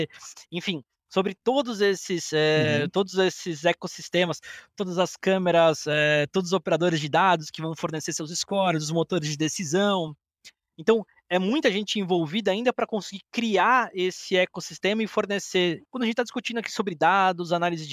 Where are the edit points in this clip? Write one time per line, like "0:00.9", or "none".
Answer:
0:15.9